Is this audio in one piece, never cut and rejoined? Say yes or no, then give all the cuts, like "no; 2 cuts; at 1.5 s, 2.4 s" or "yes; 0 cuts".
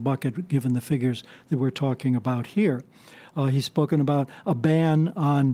yes; 0 cuts